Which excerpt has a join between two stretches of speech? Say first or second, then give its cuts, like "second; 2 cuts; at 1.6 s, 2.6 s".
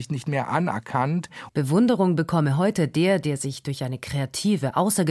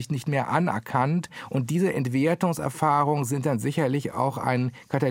first; 1 cut; at 1.5 s